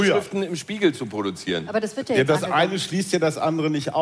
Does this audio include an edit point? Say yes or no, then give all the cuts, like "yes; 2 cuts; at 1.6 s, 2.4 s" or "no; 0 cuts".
no; 0 cuts